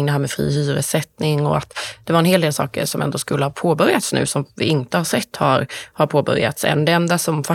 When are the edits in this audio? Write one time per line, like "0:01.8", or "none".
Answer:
none